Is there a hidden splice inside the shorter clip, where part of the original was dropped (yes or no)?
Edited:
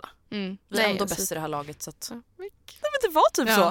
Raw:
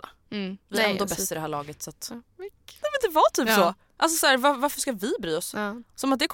no